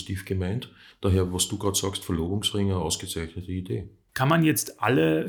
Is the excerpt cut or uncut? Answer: cut